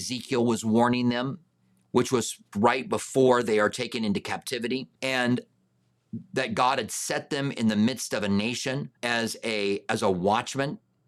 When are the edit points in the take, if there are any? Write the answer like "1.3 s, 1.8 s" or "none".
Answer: 2.5 s, 5.0 s, 9.0 s